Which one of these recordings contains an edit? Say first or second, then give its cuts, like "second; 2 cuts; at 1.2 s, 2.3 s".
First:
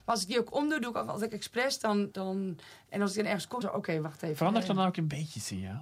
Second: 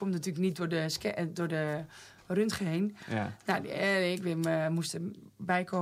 first; 2 cuts; at 2.1 s, 3.6 s